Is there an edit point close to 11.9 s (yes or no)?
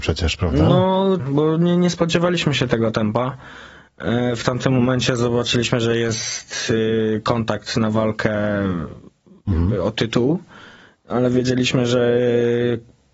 no